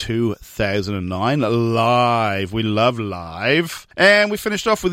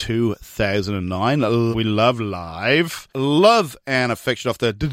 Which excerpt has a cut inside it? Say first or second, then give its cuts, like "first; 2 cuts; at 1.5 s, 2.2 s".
second; 2 cuts; at 1.7 s, 3.1 s